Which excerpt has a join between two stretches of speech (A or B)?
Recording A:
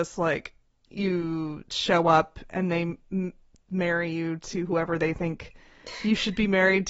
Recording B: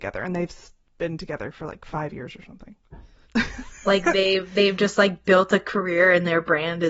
B